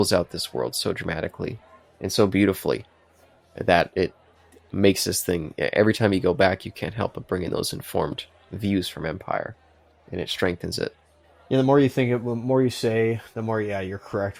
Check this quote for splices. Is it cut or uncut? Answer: uncut